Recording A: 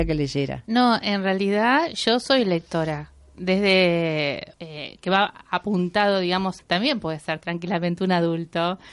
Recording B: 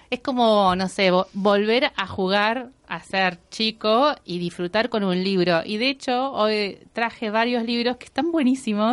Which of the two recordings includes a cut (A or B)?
A